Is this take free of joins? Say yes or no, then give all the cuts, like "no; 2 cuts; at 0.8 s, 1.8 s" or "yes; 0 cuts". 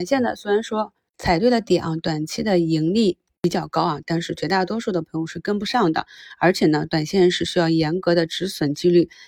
yes; 0 cuts